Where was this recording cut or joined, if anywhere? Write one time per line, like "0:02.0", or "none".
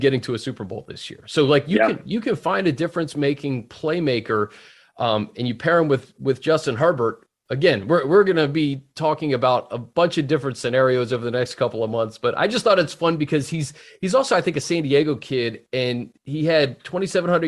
none